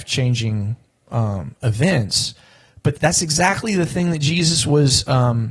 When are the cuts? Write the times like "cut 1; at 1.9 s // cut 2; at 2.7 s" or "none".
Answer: cut 1; at 2.9 s